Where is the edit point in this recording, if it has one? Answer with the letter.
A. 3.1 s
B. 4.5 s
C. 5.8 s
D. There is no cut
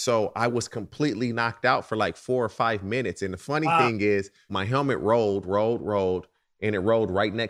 B